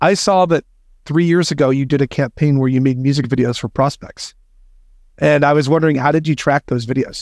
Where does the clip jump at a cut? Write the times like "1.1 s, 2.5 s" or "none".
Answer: none